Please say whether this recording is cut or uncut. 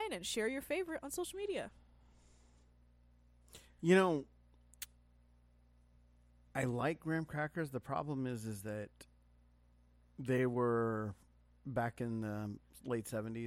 uncut